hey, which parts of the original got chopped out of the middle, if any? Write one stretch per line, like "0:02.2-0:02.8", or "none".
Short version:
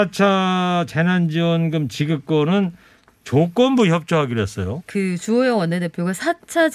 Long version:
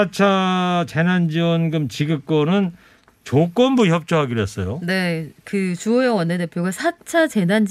0:04.8-0:05.4